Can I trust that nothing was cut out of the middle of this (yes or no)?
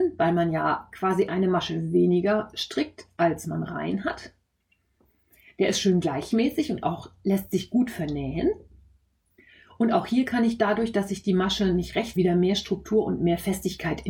no